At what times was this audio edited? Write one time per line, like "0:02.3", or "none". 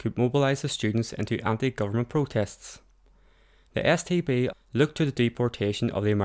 0:04.5